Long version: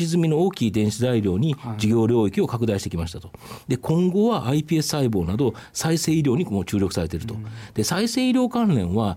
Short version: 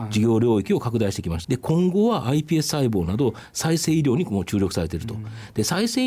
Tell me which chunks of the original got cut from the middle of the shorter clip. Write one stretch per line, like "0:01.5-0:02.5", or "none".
0:03.1-0:03.6

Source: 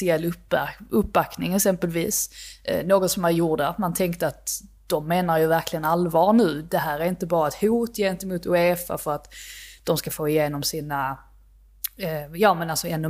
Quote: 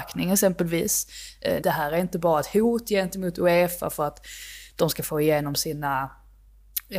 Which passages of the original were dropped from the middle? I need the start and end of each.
0:02.8-0:06.7

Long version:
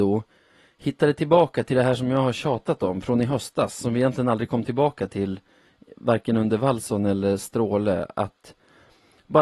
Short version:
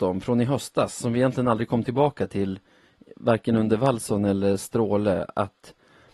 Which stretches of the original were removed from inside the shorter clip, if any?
none

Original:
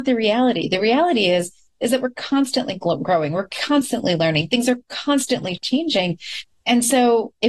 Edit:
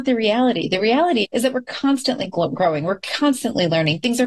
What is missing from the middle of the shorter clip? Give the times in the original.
0:01.2-0:01.7

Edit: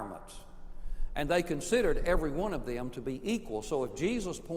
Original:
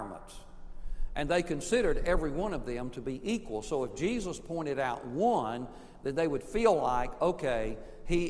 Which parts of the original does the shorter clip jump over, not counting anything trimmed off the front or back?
none

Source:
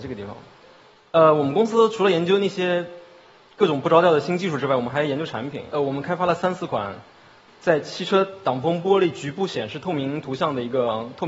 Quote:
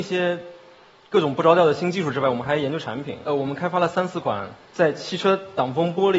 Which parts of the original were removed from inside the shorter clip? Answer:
0:07.1-0:07.5

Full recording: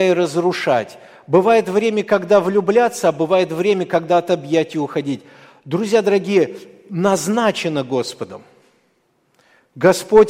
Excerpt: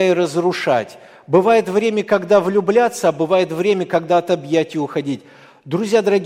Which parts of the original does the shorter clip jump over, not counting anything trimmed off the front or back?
none

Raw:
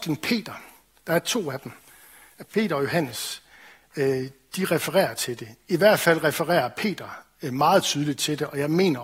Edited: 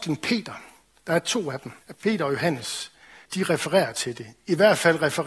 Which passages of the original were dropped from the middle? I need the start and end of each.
0:01.8-0:02.3
0:03.8-0:04.5

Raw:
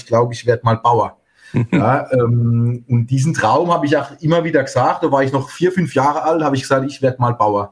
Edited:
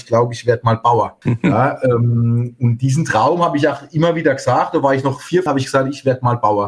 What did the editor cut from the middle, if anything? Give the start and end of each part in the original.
0:01.2-0:01.5
0:05.7-0:06.4

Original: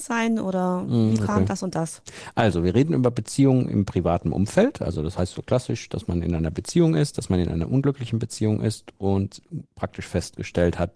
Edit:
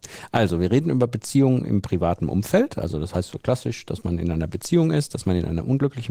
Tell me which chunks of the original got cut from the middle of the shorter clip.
none

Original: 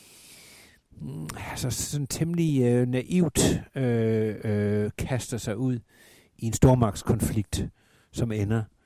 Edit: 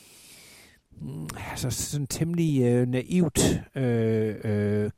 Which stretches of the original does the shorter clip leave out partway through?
none

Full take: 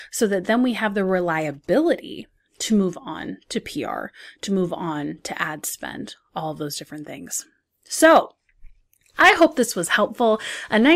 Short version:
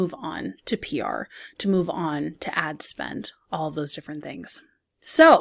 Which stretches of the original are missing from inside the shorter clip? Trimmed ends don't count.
none

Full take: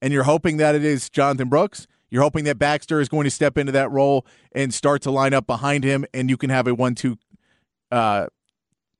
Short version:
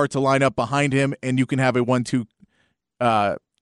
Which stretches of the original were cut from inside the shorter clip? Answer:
none

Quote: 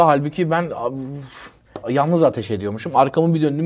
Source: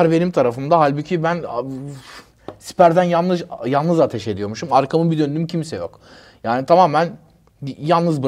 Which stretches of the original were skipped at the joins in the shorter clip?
0:02.5-0:03.6

